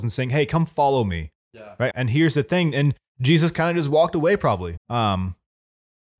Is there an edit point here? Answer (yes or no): yes